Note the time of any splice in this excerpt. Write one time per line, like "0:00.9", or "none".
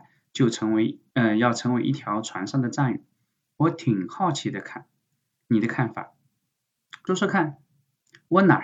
0:07.1